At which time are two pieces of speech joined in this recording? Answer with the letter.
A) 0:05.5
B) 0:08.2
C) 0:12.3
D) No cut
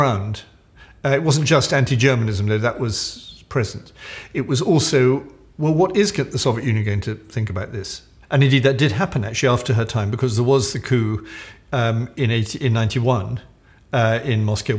B